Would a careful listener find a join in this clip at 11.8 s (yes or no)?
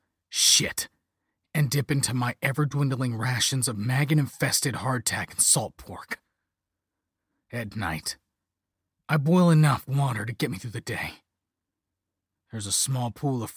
no